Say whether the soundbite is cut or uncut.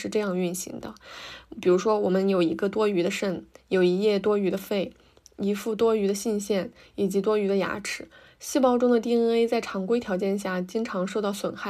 uncut